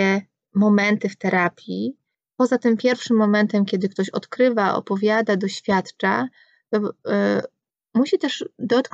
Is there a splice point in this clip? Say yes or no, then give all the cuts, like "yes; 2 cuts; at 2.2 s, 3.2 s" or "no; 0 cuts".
no; 0 cuts